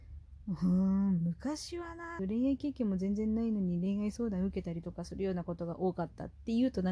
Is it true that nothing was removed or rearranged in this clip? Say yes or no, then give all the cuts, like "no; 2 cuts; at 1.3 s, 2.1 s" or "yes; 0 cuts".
no; 1 cut; at 2.2 s